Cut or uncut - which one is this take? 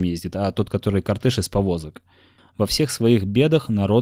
cut